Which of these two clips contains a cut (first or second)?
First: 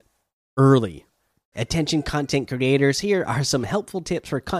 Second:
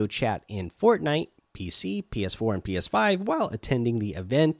first